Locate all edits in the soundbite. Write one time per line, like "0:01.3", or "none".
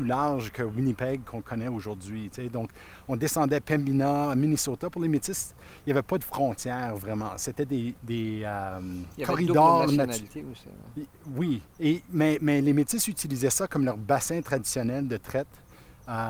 none

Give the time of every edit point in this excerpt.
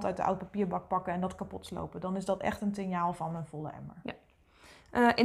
none

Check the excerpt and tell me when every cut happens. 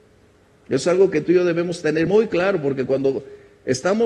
none

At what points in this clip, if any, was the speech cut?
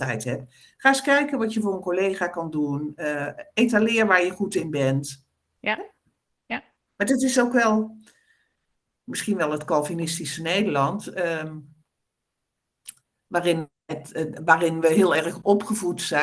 none

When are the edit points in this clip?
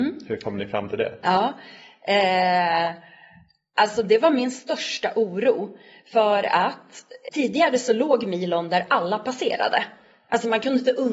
0:07.3

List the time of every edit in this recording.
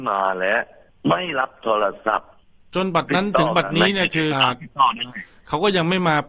0:04.3

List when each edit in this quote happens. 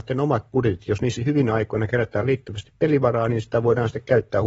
0:01.2

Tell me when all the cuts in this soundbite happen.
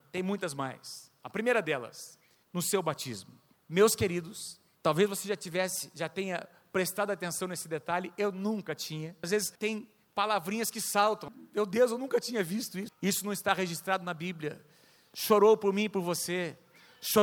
0:09.2
0:12.9

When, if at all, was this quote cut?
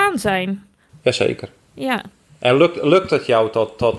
none

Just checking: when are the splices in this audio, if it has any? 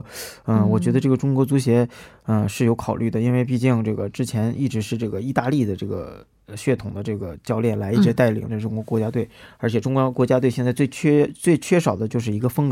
none

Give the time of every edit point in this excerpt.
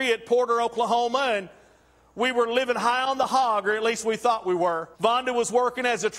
0:04.9

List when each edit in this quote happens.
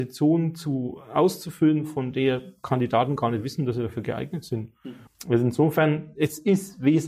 0:05.1

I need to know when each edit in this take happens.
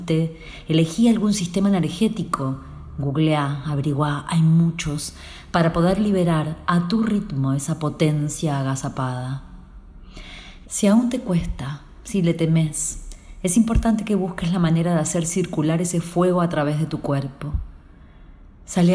0:10.6

